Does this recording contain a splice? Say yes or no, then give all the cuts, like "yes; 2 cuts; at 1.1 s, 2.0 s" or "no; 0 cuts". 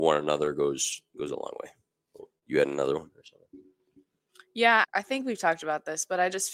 yes; 1 cut; at 4.8 s